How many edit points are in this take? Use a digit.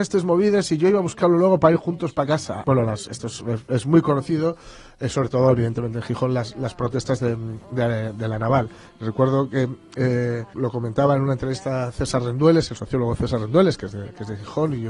2